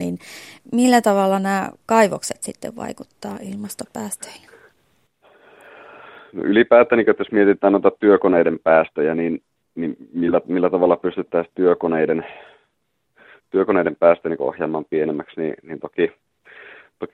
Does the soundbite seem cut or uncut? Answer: uncut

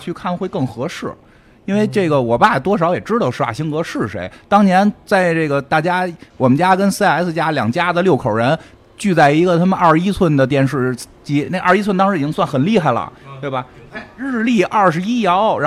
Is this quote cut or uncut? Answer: uncut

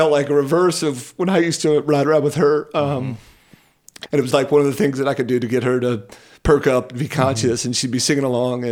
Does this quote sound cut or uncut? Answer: cut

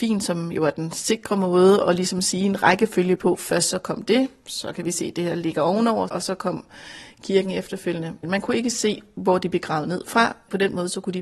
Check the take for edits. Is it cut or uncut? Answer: cut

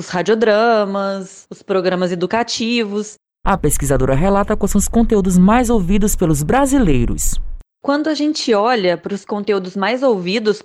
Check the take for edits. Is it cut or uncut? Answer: uncut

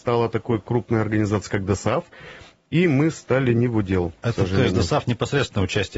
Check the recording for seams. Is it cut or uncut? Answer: uncut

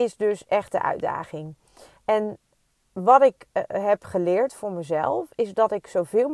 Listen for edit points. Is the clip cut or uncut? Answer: uncut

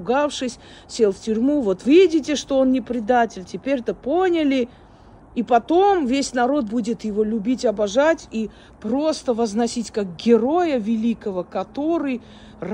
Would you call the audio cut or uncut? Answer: cut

